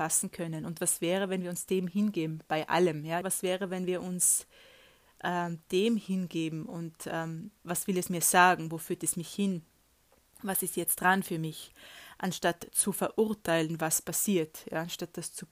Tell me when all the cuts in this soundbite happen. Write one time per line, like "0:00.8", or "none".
0:03.2
0:07.6